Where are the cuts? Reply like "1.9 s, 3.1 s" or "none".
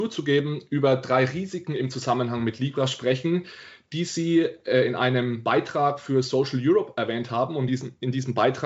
none